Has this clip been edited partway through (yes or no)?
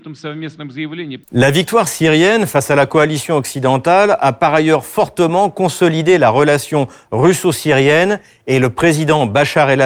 yes